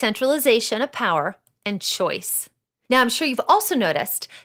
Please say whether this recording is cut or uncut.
uncut